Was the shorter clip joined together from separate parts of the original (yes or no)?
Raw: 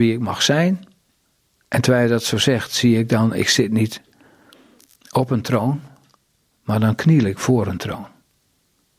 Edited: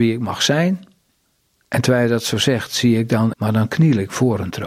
yes